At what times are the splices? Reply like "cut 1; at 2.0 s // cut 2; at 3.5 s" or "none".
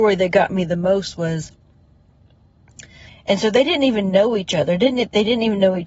cut 1; at 3.1 s